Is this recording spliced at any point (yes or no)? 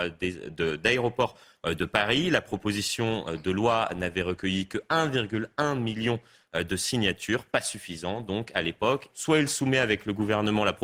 yes